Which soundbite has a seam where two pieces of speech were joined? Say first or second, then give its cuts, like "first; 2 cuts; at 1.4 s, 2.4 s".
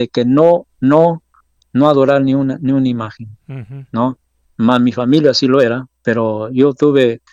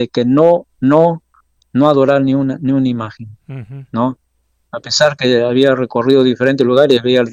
first; 2 cuts; at 4.4 s, 5.9 s